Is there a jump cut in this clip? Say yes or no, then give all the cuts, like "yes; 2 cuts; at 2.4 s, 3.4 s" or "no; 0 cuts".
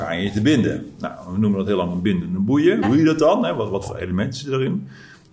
yes; 1 cut; at 2.8 s